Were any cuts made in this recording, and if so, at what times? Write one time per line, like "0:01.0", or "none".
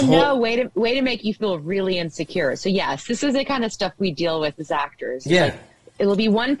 none